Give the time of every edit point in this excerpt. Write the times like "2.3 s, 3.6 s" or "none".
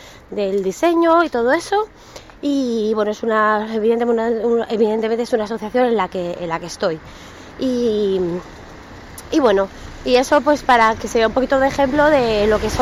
none